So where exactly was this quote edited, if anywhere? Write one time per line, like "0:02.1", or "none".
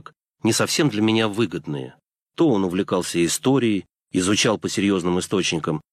0:02.2